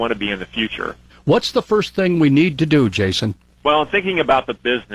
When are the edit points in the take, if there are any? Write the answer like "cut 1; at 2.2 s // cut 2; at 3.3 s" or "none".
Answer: cut 1; at 1.1 s